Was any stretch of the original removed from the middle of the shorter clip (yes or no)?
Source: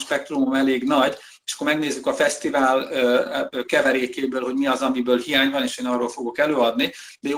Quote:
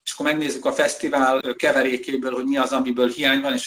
yes